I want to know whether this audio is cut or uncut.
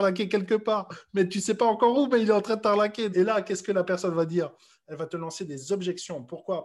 cut